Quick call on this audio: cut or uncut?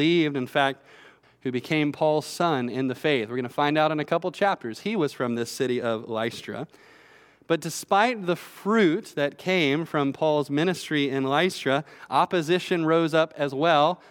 cut